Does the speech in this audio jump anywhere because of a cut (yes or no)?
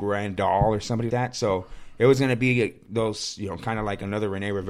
yes